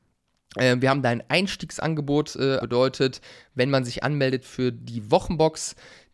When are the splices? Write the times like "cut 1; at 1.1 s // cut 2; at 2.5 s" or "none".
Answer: cut 1; at 2.6 s

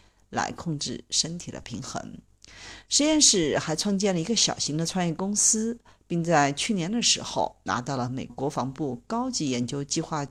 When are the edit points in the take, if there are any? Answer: cut 1; at 8.3 s

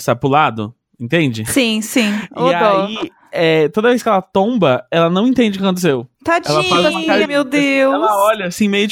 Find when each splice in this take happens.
cut 1; at 6.1 s // cut 2; at 7.2 s

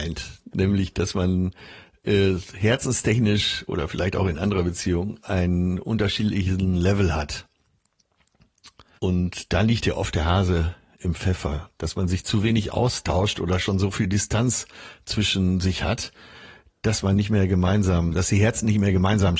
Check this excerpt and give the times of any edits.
cut 1; at 9.0 s

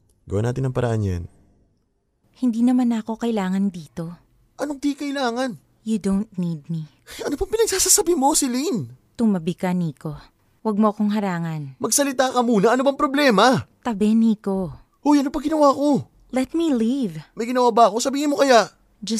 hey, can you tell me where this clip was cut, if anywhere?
cut 1; at 2.2 s

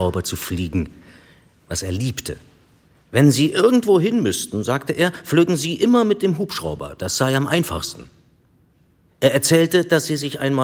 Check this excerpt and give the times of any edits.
none

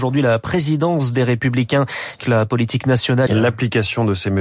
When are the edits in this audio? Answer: cut 1; at 2.2 s // cut 2; at 3.3 s

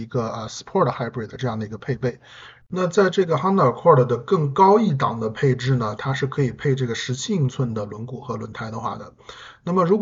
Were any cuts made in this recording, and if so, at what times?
cut 1; at 2.6 s // cut 2; at 6.0 s

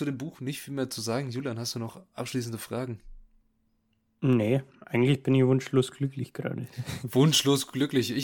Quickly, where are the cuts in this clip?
none

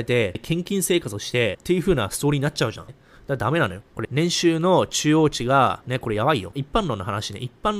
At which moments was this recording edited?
cut 1; at 6.5 s

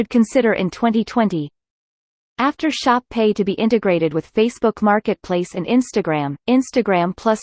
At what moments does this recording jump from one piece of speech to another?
cut 1; at 2.2 s // cut 2; at 6.4 s

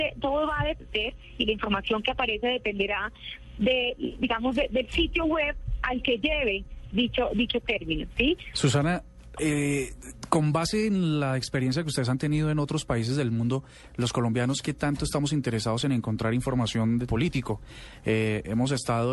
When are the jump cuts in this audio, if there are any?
cut 1; at 8.5 s // cut 2; at 17.1 s

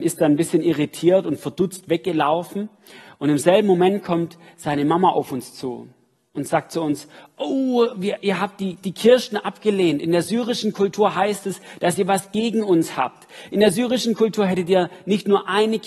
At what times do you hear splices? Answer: none

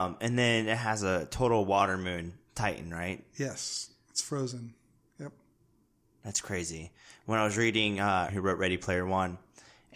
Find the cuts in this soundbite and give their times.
cut 1; at 8.3 s

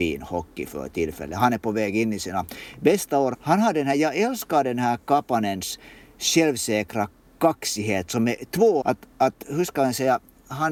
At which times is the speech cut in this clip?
cut 1; at 3.3 s // cut 2; at 8.8 s

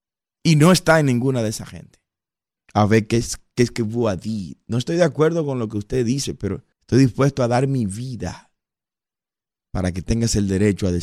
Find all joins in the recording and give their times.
cut 1; at 2.6 s // cut 2; at 6.7 s

